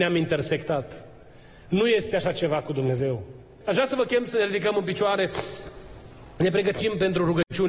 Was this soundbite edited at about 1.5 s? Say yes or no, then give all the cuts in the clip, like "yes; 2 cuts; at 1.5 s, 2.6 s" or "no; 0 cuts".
no; 1 cut; at 3.6 s